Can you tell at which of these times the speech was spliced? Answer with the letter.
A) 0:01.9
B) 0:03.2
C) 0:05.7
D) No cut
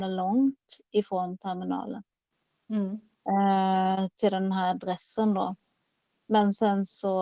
D